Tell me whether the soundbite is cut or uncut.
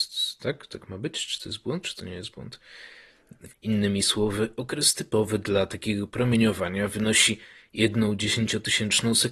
cut